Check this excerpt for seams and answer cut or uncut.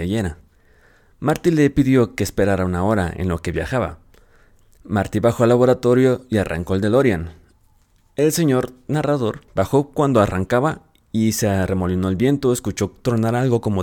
uncut